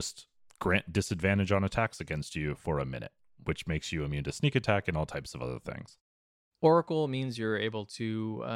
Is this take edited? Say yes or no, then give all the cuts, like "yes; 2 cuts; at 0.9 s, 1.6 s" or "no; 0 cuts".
no; 0 cuts